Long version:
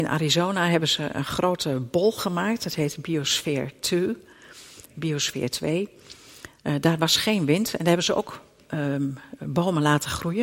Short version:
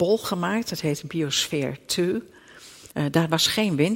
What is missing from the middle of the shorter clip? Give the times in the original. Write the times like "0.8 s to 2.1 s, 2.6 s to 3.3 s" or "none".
4.8 s to 6.6 s